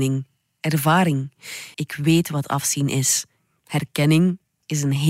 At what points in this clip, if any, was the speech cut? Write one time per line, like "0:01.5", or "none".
0:01.7